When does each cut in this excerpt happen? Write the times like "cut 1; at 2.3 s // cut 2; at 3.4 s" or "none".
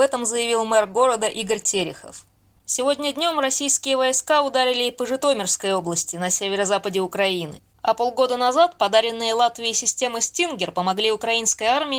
cut 1; at 2.6 s // cut 2; at 7.6 s